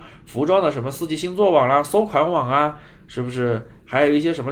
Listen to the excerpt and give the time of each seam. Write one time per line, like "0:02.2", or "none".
none